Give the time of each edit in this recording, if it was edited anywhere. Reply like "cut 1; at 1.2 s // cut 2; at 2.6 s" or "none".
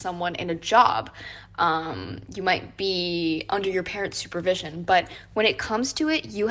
none

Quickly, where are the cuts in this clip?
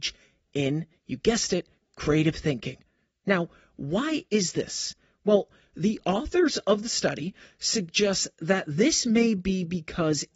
none

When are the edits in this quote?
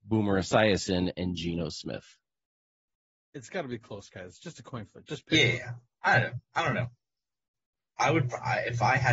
none

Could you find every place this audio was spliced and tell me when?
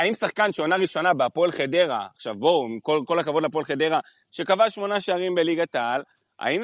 cut 1; at 4.2 s

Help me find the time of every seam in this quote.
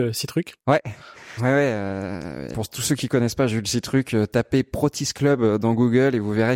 cut 1; at 1.4 s // cut 2; at 2.5 s

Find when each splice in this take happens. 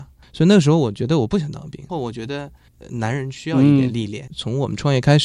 cut 1; at 1.9 s // cut 2; at 4.3 s

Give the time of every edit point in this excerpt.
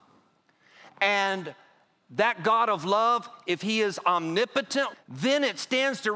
cut 1; at 4.9 s

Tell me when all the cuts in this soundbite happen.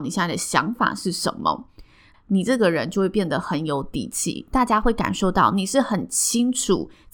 cut 1; at 2.1 s

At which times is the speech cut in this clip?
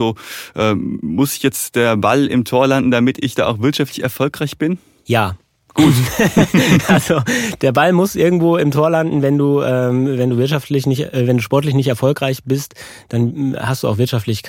none

